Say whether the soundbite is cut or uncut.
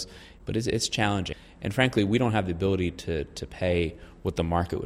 uncut